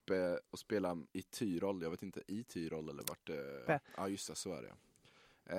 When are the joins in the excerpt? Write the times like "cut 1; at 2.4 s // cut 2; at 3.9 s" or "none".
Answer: cut 1; at 1.1 s // cut 2; at 3.7 s